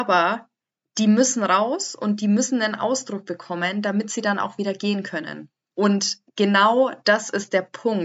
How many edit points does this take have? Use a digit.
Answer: 1